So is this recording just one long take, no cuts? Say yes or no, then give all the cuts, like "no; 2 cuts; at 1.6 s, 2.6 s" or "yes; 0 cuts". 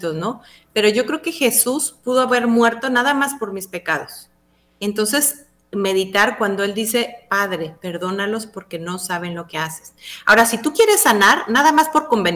yes; 0 cuts